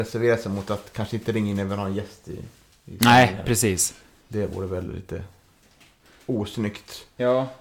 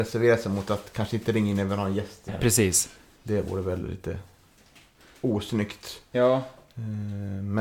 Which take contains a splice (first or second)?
second